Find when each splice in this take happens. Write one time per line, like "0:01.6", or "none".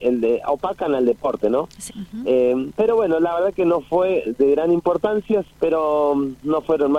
0:01.9
0:05.5